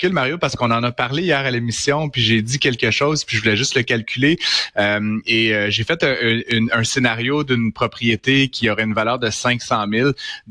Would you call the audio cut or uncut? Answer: cut